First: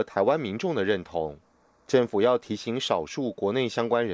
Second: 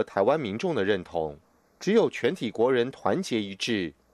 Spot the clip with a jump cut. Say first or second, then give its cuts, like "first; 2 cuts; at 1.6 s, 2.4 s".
second; 1 cut; at 1.6 s